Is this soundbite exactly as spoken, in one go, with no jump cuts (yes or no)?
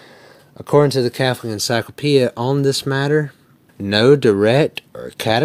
no